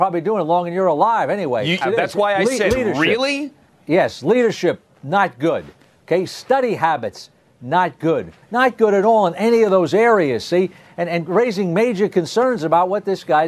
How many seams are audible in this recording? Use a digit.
2